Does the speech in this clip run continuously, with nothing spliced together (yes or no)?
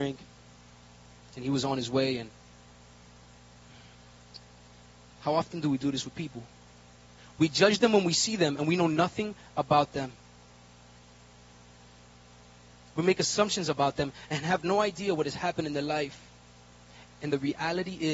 yes